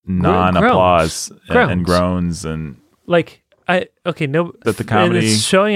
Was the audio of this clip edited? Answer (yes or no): yes